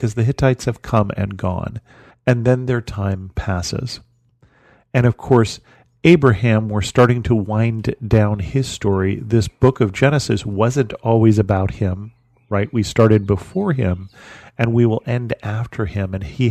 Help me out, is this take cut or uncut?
cut